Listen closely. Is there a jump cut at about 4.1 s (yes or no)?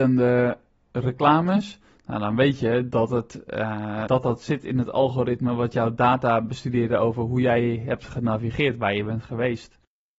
yes